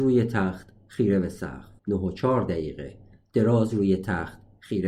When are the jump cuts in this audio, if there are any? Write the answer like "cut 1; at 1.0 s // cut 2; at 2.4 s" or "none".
cut 1; at 1.8 s